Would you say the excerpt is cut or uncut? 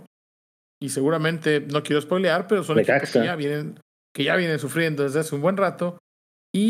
uncut